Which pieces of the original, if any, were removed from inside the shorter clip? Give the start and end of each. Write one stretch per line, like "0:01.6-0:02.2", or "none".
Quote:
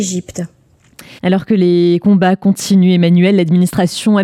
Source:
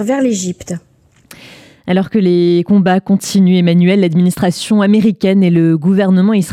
0:01.5-0:01.8